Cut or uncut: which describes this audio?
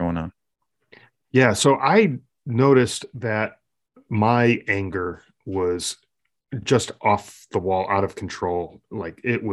uncut